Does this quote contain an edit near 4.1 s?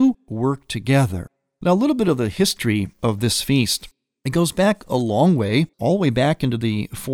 no; 1 cut; at 5.7 s

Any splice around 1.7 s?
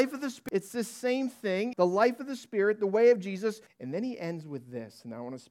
yes; 2 cuts; at 1.7 s, 3.7 s

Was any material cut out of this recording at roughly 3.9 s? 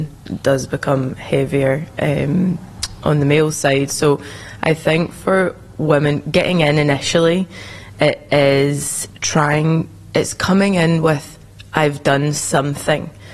no; 0 cuts

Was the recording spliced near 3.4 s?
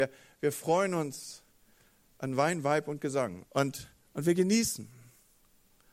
yes; 1 cut; at 3.4 s

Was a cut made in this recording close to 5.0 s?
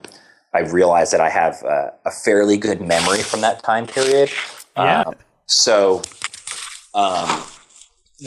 yes; 1 cut; at 5.0 s

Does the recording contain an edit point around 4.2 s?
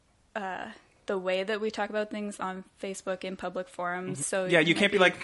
yes; 2 cuts; at 2.4 s, 4.2 s

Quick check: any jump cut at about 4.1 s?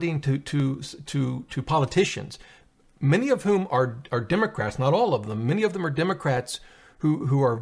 yes; 1 cut; at 4.1 s

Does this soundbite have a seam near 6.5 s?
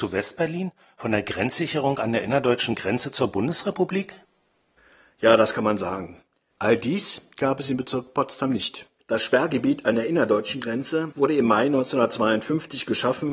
yes; 2 cuts; at 6.5 s, 9.0 s

